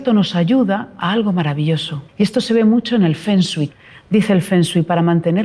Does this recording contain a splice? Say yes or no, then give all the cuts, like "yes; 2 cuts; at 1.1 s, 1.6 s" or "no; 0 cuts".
yes; 1 cut; at 2.1 s